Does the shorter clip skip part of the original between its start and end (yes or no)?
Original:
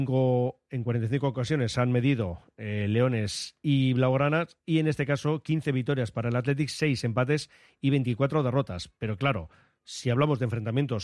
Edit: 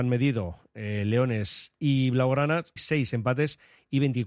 yes